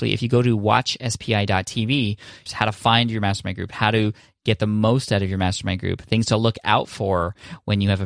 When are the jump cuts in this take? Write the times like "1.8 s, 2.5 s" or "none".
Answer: 2.5 s